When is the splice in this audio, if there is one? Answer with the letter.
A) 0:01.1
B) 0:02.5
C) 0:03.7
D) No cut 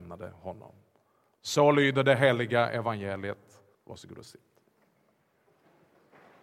C